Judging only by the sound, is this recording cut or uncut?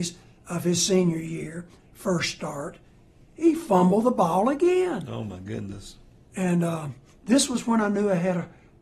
uncut